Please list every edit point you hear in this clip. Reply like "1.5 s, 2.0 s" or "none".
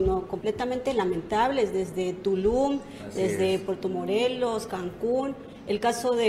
none

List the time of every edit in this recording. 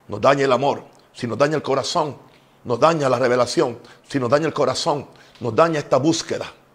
none

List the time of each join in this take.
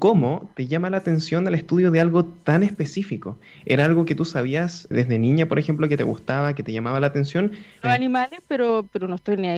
4.9 s, 7.8 s

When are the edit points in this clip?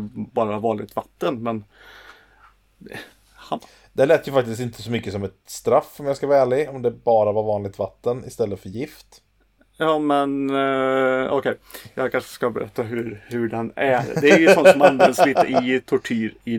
none

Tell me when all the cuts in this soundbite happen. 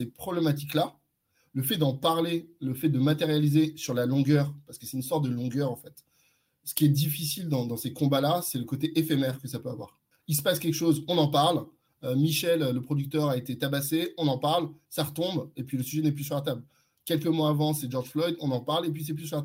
10.1 s

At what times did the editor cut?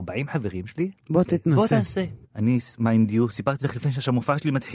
2.2 s

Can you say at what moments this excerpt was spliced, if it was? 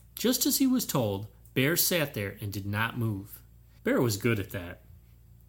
3.8 s

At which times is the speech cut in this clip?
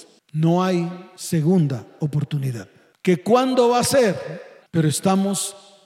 4.6 s

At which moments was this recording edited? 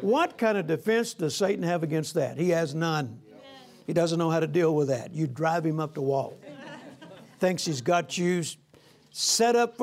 none

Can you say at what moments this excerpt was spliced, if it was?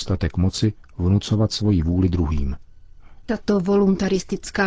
3.2 s

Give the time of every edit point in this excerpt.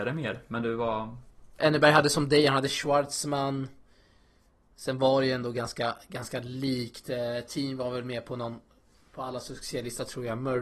1.6 s

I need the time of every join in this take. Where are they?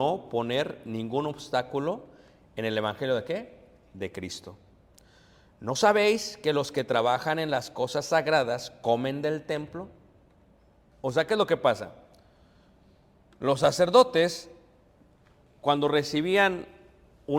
10.9 s

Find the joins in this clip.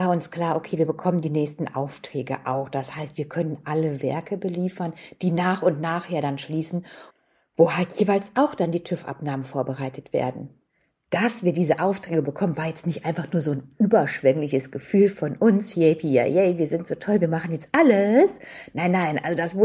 none

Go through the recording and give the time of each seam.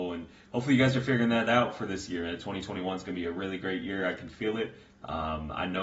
none

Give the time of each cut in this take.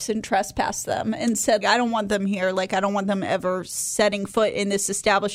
1.6 s

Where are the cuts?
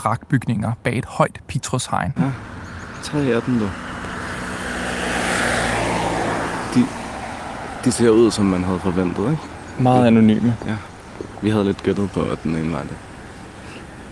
2.2 s

